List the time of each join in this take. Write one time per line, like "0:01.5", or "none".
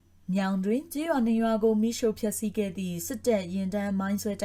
none